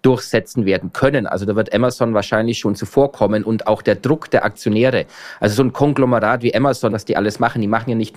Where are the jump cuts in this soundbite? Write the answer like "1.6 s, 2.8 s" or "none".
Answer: 6.9 s